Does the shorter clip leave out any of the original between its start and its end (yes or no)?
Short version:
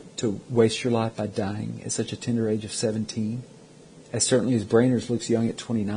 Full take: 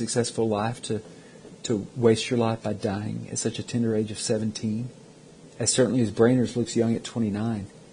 no